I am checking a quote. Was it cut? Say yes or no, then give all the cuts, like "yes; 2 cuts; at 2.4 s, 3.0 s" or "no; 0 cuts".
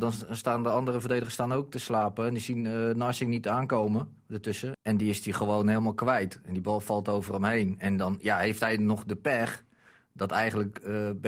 yes; 1 cut; at 4.7 s